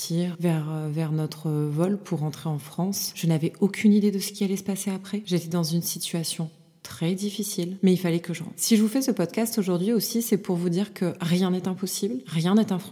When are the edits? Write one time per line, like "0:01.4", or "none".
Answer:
none